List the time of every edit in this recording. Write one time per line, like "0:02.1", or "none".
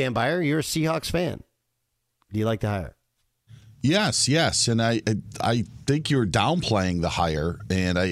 none